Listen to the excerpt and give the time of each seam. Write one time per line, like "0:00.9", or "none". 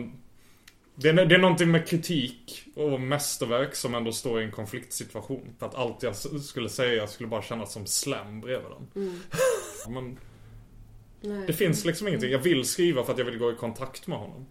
0:05.6
0:09.8
0:11.2